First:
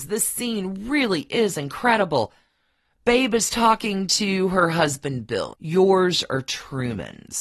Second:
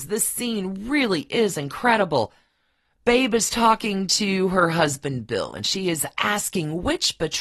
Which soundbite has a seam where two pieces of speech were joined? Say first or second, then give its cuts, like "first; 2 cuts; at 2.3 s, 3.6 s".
first; 1 cut; at 5.5 s